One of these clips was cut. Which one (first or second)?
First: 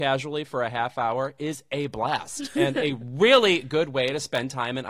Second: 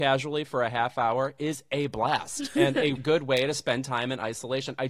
second